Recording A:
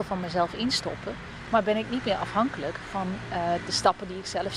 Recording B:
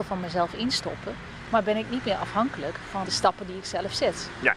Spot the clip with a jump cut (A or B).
B